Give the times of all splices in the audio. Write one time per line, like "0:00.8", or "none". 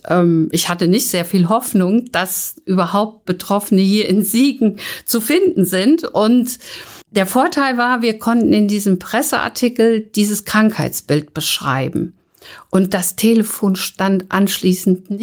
0:07.0